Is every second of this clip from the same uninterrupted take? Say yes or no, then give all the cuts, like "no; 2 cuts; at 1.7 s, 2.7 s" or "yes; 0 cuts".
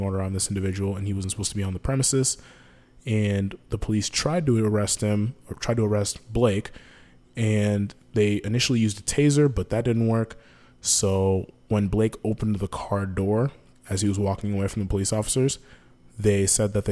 yes; 0 cuts